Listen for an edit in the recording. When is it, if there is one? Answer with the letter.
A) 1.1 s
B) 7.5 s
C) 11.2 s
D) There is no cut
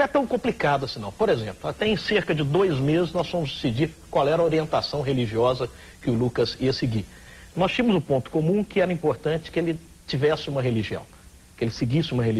D